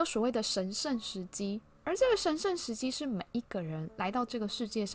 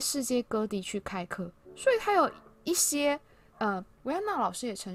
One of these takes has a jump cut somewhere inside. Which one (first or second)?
second